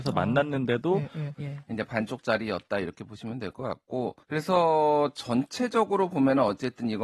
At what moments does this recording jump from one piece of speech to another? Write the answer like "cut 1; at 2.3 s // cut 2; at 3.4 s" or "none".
cut 1; at 1.3 s // cut 2; at 4.2 s

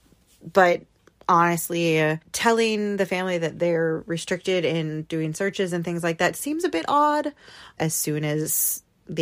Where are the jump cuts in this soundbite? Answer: cut 1; at 7.8 s

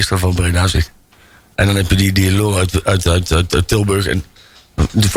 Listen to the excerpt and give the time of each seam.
none

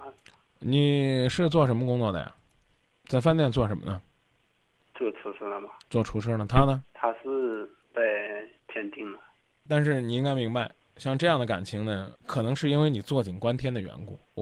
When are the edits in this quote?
cut 1; at 2.9 s // cut 2; at 9.7 s

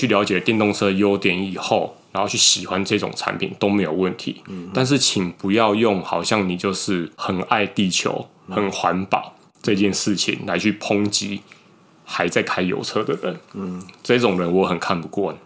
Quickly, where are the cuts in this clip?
cut 1; at 7.1 s

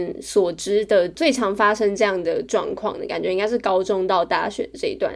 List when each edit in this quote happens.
none

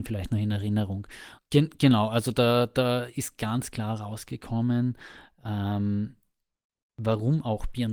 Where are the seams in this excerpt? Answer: cut 1; at 1.4 s

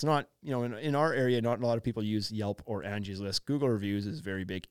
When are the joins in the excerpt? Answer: none

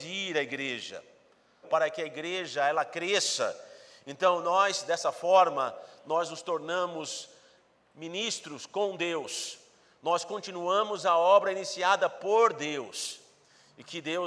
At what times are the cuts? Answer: cut 1; at 1.6 s

